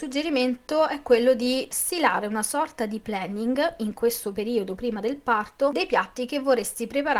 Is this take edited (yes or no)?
no